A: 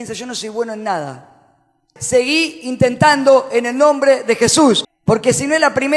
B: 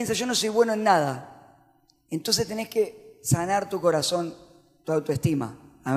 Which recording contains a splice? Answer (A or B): A